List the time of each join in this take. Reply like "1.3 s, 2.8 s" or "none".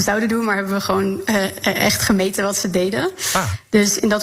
none